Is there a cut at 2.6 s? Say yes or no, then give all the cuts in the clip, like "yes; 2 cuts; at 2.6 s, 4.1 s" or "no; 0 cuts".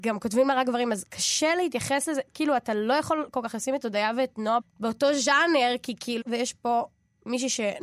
no; 2 cuts; at 4.6 s, 6.2 s